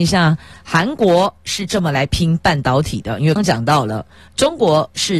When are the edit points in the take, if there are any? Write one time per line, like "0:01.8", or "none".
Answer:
0:03.4